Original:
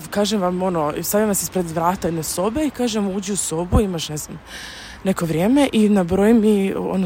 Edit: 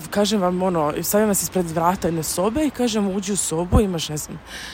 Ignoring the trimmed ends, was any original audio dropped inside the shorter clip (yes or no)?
no